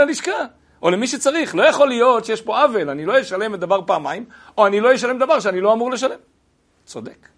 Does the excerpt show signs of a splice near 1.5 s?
no; 0 cuts

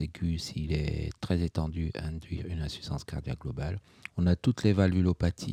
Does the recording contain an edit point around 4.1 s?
yes; 1 cut; at 4.1 s

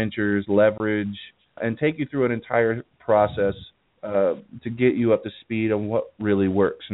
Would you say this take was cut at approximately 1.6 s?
yes; 1 cut; at 1.6 s

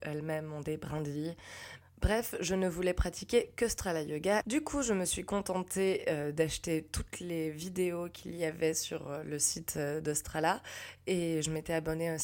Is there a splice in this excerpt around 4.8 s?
no; 1 cut; at 1.8 s

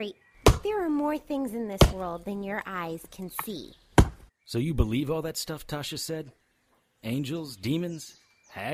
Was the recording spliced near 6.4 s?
no; 1 cut; at 4.3 s

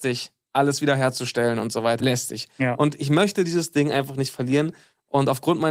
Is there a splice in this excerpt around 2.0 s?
yes; 1 cut; at 2.0 s

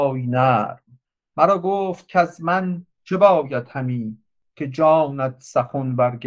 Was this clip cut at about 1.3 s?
no; 1 cut; at 2.9 s

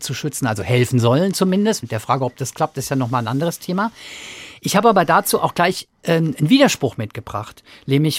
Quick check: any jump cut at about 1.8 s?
no; 0 cuts

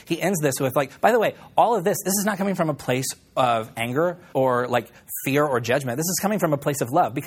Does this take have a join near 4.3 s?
yes; 1 cut; at 4.3 s

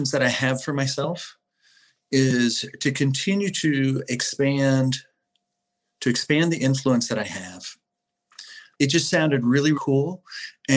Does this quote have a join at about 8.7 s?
yes; 2 cuts; at 8.7 s, 9.7 s

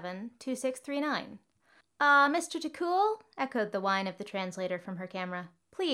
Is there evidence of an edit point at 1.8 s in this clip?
yes; 1 cut; at 1.8 s

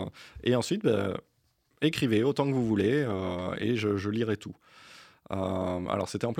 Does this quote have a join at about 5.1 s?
no; 0 cuts

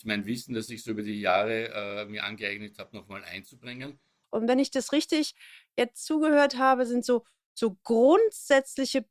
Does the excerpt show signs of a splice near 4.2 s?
yes; 1 cut; at 4.2 s

